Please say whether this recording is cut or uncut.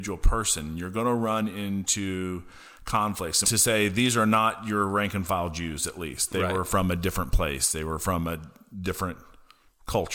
cut